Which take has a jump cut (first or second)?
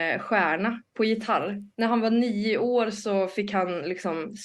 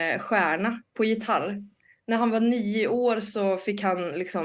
first